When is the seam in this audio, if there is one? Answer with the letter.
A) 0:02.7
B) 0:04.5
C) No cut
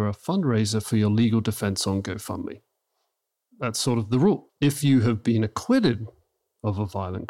B